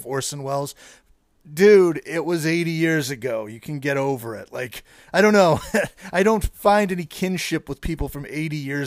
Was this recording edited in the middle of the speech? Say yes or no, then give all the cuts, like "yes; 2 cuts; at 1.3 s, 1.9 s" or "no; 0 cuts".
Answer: no; 0 cuts